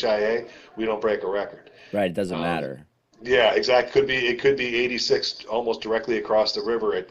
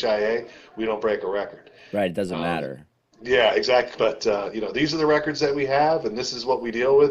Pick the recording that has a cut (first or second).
second